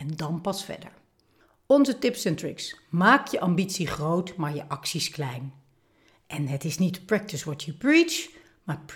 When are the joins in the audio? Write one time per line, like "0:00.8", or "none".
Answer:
none